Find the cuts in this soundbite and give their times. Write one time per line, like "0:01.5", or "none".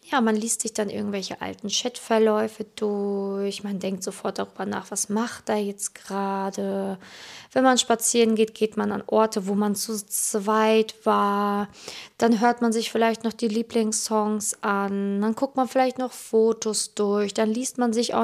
none